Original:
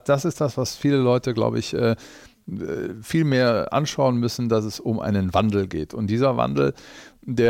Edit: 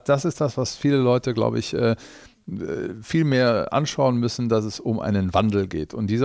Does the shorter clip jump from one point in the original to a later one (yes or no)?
no